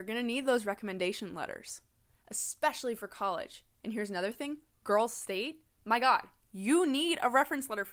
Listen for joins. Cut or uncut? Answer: uncut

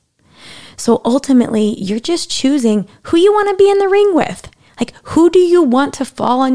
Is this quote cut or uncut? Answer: uncut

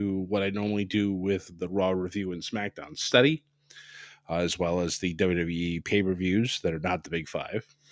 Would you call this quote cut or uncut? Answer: uncut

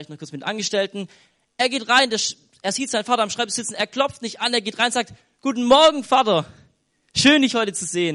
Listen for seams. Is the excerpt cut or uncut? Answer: uncut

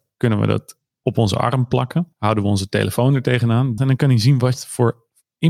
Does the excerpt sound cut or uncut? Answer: cut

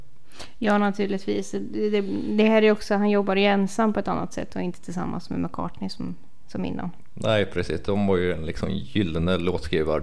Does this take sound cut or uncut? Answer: uncut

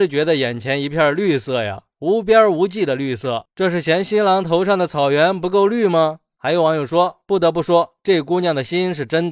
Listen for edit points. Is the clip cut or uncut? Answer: cut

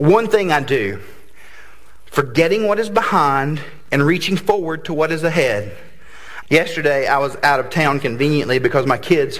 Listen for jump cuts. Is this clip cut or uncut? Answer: cut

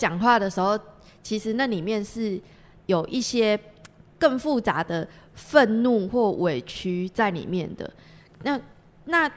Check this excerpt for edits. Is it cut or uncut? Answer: uncut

